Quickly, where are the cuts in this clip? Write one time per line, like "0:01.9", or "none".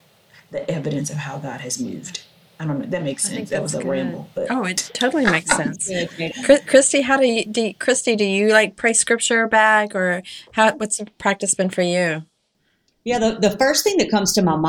none